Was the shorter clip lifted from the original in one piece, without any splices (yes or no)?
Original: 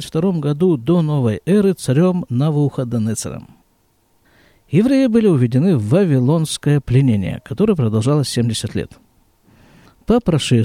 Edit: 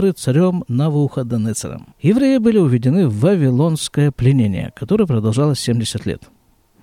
no